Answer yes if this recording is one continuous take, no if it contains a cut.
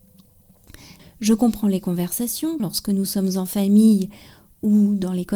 no